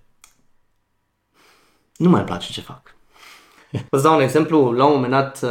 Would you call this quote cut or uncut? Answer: cut